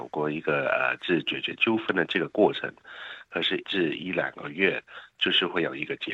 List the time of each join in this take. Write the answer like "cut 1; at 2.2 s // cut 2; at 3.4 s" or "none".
cut 1; at 3.6 s